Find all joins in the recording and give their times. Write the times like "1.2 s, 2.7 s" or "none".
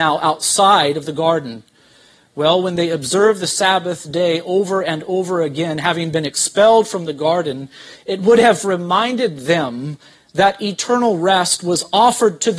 none